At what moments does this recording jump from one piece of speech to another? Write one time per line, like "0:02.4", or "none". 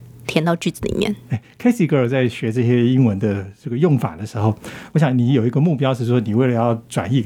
none